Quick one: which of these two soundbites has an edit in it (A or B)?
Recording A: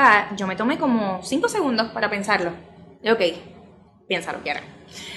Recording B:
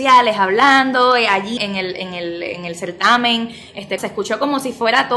B